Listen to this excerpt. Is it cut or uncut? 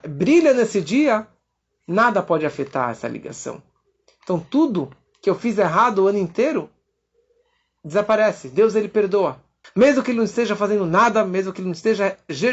cut